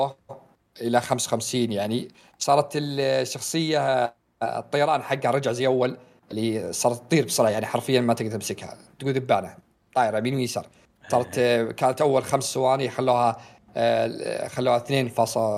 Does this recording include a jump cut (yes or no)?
no